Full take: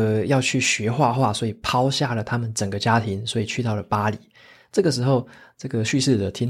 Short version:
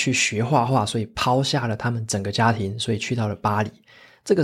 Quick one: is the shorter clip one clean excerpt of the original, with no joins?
yes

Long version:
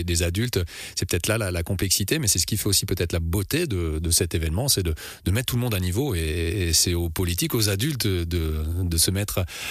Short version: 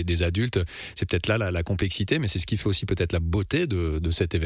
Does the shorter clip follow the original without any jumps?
yes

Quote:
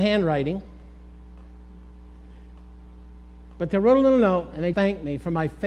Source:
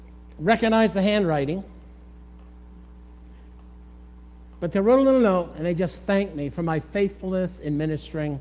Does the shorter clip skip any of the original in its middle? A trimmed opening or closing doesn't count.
yes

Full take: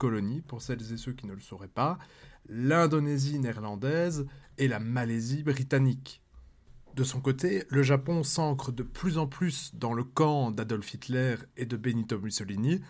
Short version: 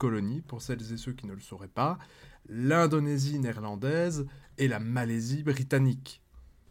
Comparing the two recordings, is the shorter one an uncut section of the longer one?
yes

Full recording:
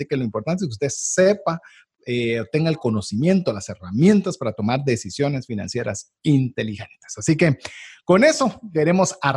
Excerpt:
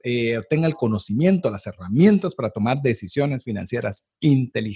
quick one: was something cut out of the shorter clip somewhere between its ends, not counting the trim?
no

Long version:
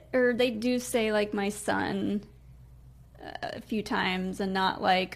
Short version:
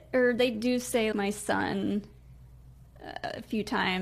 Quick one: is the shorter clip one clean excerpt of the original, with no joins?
no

